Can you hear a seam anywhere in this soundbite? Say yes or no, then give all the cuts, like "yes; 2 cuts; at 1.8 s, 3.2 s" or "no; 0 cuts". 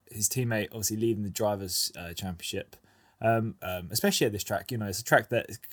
yes; 1 cut; at 3.6 s